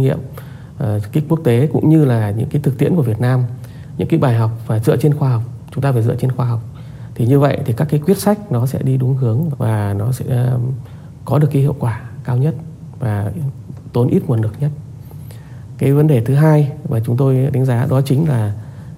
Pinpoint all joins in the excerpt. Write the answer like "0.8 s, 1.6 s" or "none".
9.5 s